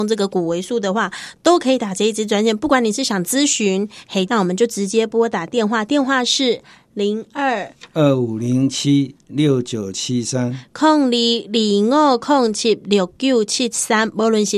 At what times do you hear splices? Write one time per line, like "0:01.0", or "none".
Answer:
0:04.3